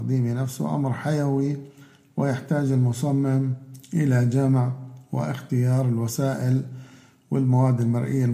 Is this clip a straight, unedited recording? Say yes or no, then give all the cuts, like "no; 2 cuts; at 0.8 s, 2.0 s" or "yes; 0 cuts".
yes; 0 cuts